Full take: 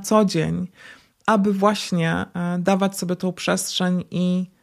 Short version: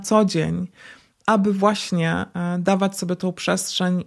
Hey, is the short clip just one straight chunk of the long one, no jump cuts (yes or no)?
yes